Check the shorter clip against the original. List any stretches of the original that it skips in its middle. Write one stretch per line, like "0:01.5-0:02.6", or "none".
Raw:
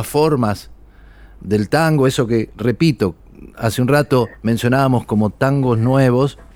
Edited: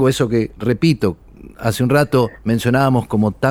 none